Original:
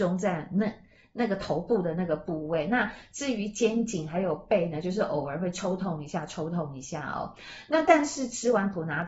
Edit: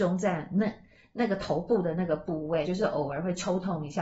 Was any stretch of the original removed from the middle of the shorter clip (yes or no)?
yes